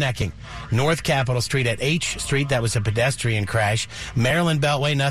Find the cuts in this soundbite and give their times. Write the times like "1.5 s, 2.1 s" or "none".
none